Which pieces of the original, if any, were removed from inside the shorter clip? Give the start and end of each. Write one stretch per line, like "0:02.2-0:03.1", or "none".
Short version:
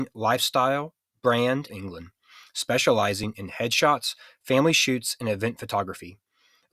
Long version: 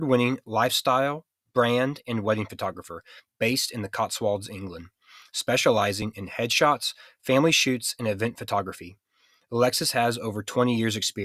0:02.0-0:04.5

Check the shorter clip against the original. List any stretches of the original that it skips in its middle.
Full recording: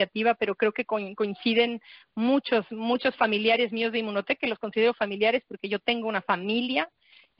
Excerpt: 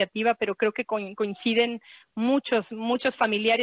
none

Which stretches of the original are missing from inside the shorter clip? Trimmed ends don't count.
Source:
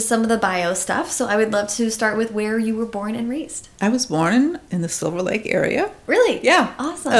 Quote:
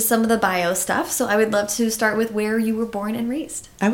none

